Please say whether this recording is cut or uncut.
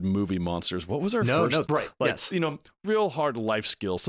cut